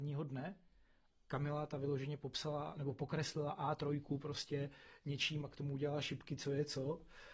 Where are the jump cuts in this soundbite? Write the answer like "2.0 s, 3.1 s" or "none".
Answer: 1.1 s